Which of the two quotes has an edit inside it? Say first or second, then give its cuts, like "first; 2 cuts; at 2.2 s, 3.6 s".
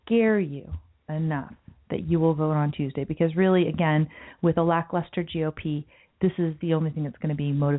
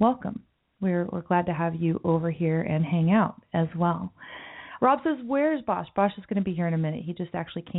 second; 1 cut; at 4.8 s